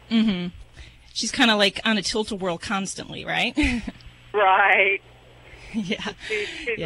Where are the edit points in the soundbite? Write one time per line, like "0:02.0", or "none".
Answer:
none